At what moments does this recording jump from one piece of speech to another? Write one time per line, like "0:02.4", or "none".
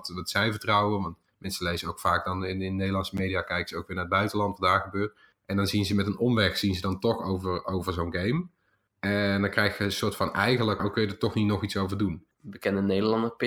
0:10.8
0:12.3